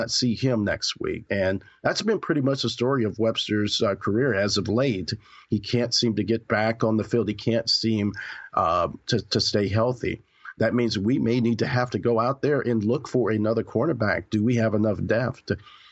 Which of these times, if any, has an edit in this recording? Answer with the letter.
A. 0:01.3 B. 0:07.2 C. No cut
A